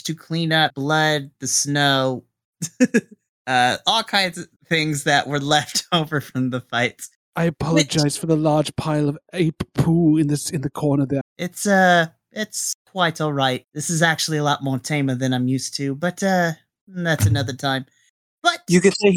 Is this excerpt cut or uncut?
cut